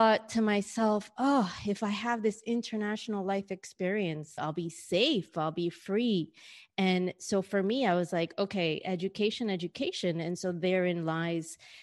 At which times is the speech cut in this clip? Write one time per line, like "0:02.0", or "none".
0:04.4